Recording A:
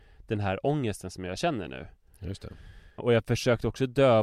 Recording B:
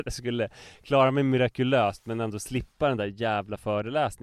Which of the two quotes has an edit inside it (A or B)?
A